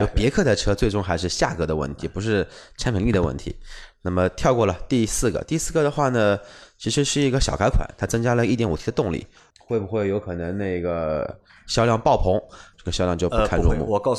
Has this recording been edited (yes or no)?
yes